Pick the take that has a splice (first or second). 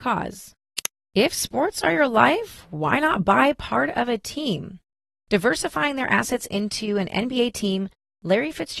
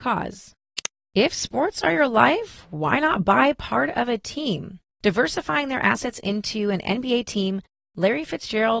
second